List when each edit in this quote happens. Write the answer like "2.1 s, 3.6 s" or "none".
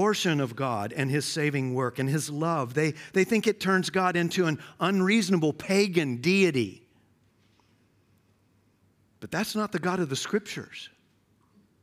none